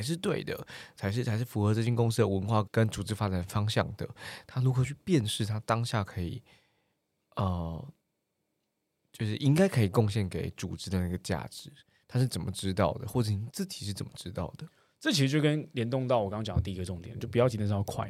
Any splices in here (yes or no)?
yes